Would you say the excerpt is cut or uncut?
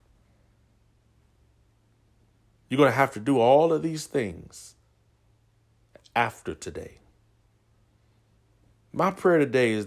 uncut